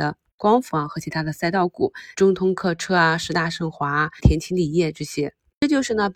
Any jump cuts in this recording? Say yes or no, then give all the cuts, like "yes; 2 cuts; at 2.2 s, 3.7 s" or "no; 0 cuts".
yes; 2 cuts; at 2.1 s, 4.2 s